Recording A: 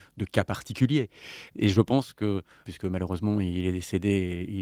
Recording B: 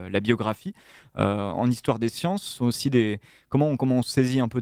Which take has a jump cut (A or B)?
A